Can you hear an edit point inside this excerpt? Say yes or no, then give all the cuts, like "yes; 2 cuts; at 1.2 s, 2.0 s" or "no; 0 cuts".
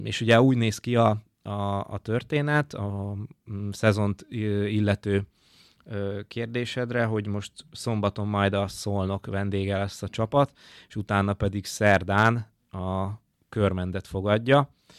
no; 0 cuts